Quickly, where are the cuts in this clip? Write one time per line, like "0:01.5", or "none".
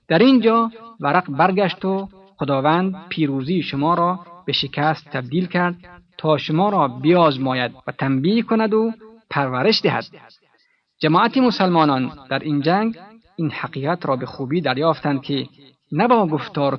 0:07.8